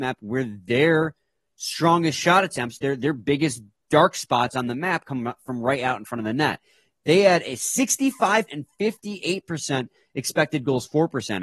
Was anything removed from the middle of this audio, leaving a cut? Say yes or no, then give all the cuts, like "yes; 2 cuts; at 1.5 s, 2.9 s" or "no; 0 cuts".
yes; 1 cut; at 8.5 s